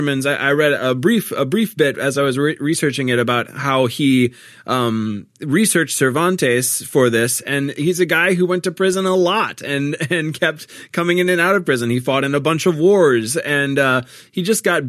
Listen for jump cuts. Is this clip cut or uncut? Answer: uncut